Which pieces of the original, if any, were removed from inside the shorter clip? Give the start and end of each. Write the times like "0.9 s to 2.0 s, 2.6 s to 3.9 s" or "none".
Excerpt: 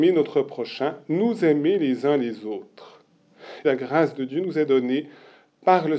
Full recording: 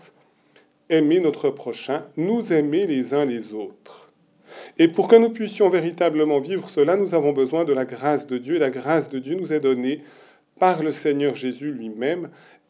4.7 s to 8.6 s